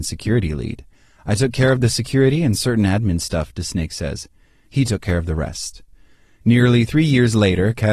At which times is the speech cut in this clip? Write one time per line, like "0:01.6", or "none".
none